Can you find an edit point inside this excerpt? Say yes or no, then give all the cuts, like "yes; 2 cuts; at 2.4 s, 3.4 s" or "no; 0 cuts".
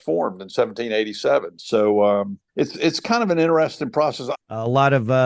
yes; 2 cuts; at 2.5 s, 4.3 s